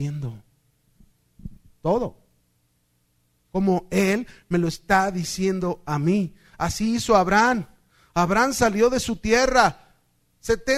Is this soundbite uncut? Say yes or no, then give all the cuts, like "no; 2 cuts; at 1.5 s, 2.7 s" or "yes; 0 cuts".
yes; 0 cuts